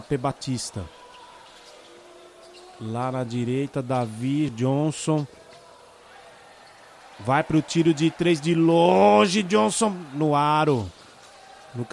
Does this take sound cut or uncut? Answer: cut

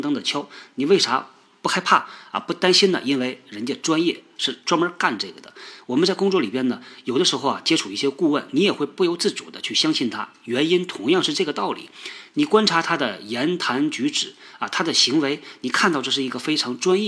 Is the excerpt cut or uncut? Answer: uncut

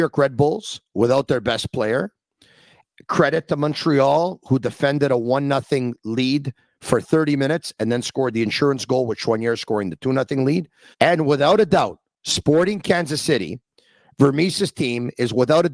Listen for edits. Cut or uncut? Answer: cut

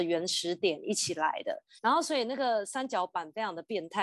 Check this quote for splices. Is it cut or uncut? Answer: cut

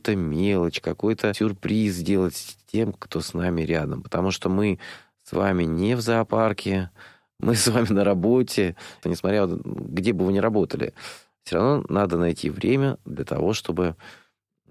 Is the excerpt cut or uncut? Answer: cut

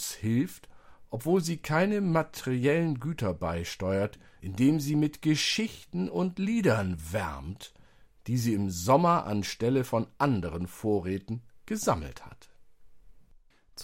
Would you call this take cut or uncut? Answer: cut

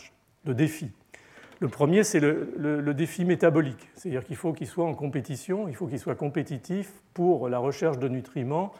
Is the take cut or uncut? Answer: uncut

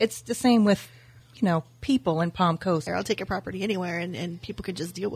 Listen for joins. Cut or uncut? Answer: cut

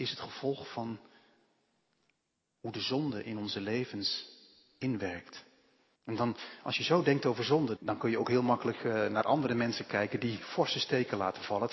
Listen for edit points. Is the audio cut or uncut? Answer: cut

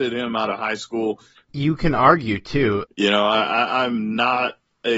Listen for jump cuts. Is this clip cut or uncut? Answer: cut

